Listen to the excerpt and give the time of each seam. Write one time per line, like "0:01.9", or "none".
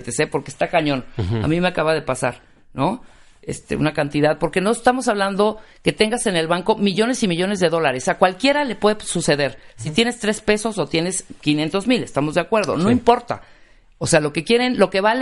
none